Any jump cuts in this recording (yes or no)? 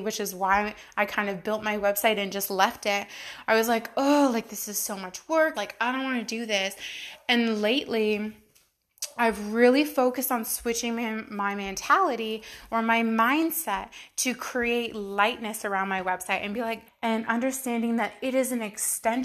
yes